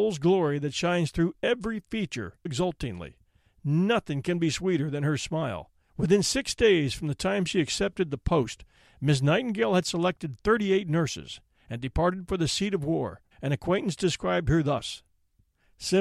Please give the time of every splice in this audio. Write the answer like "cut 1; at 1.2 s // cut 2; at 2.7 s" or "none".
cut 1; at 2.5 s // cut 2; at 5.9 s // cut 3; at 13.3 s